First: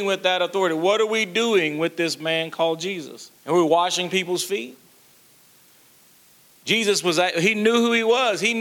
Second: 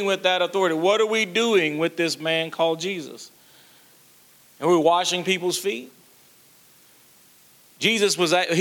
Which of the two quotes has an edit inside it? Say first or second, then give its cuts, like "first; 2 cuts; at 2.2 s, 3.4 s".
first; 1 cut; at 3.4 s